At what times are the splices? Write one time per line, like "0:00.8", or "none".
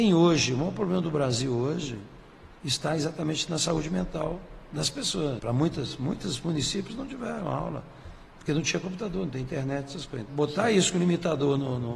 0:05.4
0:10.3